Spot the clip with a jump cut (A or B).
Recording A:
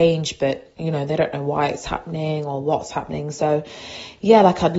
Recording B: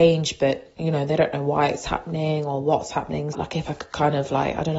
B